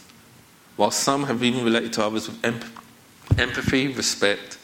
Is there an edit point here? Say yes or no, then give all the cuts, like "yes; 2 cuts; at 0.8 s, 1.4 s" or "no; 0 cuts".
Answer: no; 0 cuts